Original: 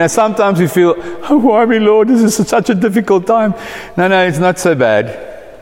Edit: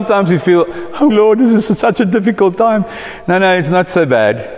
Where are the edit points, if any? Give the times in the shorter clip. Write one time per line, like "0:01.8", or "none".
0:01.1